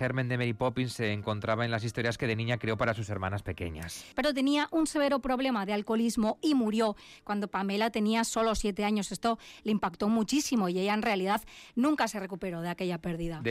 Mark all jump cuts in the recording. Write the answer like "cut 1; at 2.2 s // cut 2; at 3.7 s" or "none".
cut 1; at 4.1 s